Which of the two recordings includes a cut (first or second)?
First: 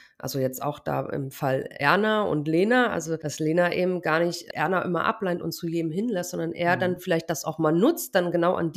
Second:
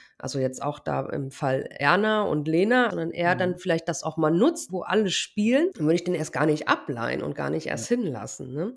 second